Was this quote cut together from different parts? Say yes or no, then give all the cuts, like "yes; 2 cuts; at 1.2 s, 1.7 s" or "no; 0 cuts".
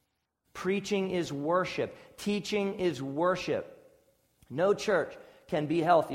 no; 0 cuts